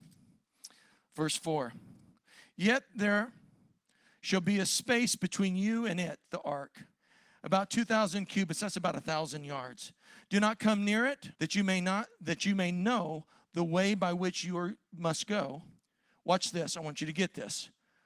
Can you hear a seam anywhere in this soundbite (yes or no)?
yes